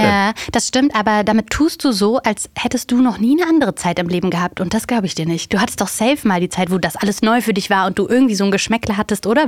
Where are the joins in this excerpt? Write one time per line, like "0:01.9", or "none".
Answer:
none